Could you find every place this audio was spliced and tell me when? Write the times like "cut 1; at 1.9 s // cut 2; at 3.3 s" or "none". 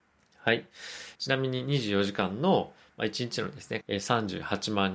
cut 1; at 1.1 s // cut 2; at 3.8 s